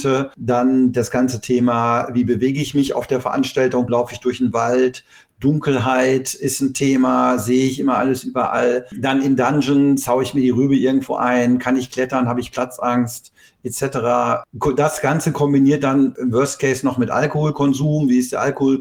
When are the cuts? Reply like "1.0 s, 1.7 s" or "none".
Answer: 3.9 s

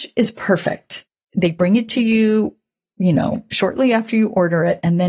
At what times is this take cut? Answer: none

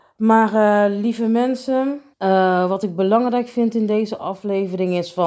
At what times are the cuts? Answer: 2.1 s

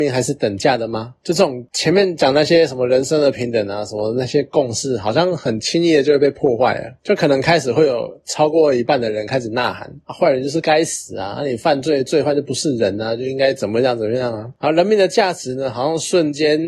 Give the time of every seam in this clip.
none

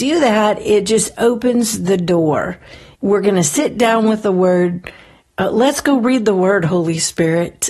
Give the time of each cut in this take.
2.9 s

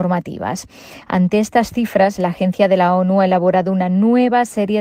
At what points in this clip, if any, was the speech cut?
1.0 s

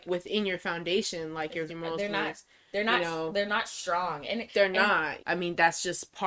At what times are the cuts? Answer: 1.7 s, 5.2 s

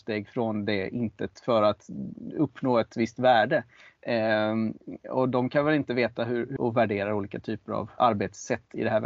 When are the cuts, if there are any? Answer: 6.6 s, 8.0 s

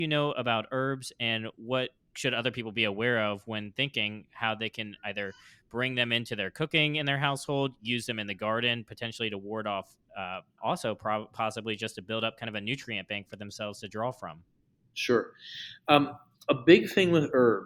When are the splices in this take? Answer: 10.6 s

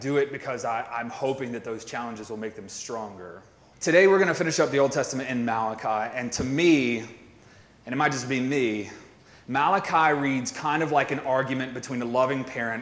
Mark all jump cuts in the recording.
3.7 s

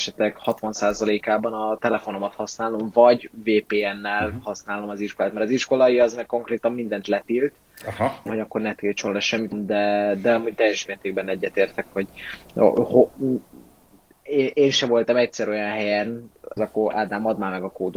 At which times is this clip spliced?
8.3 s, 9.5 s, 16.6 s

